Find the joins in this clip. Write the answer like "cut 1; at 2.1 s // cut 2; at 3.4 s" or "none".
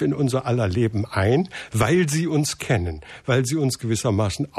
none